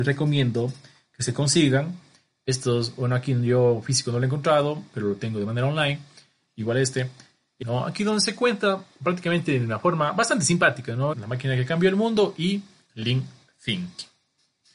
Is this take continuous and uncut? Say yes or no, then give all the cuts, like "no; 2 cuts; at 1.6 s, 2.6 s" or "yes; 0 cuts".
no; 2 cuts; at 7.6 s, 11.1 s